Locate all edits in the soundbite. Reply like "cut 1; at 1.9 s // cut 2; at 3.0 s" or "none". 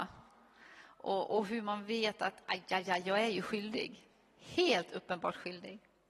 none